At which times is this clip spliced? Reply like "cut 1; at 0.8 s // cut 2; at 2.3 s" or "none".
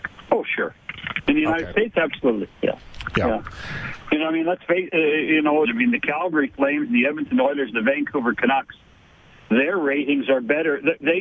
cut 1; at 5.6 s